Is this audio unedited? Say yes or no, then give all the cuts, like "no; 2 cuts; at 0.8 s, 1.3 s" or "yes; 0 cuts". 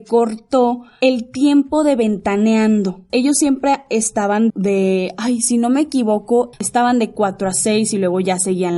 no; 3 cuts; at 3.1 s, 4.5 s, 6.5 s